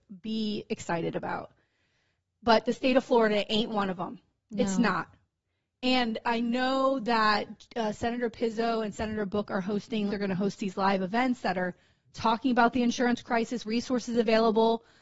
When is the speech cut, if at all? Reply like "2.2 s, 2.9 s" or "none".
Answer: 10.1 s, 13.6 s